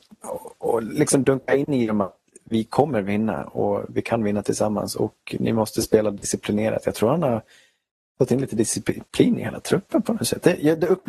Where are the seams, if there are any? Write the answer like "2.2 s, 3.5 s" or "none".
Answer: none